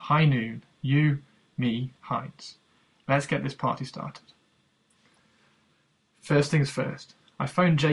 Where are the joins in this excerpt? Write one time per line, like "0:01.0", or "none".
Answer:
0:02.0